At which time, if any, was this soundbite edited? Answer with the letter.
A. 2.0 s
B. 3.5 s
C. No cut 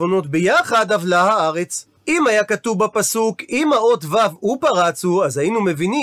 A